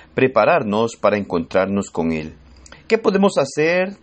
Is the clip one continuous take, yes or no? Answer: no